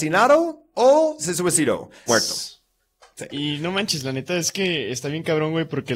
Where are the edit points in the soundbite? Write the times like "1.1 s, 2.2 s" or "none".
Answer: 2.1 s, 3.3 s